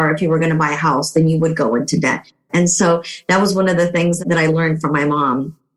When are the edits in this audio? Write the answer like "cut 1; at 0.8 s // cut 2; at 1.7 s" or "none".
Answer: cut 1; at 2.5 s